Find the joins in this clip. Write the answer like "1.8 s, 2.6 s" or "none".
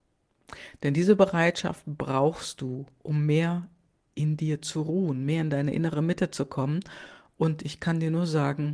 none